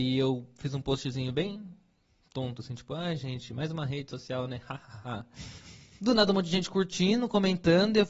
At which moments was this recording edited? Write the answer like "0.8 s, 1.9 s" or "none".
none